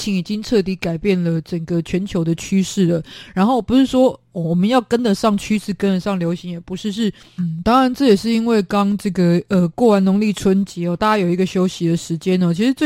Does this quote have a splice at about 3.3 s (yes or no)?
no